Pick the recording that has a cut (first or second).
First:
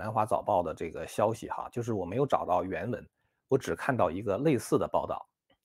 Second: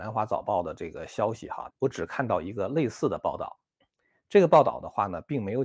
second